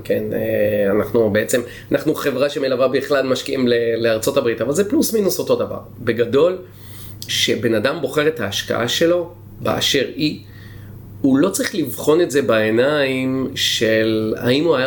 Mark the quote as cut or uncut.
uncut